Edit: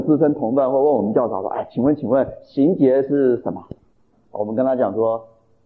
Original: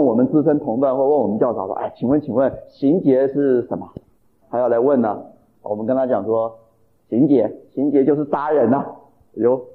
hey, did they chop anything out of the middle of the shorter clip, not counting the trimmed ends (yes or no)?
yes